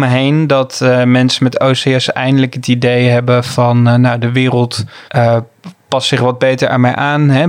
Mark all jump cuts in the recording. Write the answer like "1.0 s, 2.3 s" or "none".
5.1 s